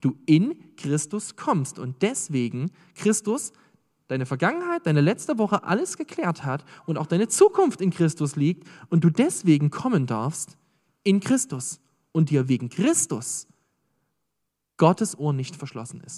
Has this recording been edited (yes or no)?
no